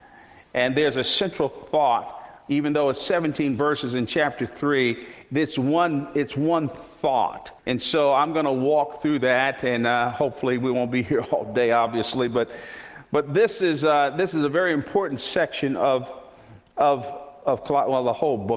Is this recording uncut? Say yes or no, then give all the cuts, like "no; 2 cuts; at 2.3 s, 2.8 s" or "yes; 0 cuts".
no; 1 cut; at 7.6 s